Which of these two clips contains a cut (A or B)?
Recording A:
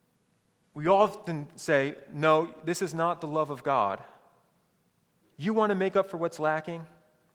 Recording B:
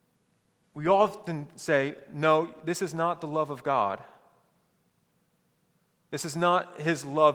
A